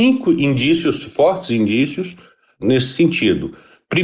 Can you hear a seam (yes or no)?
no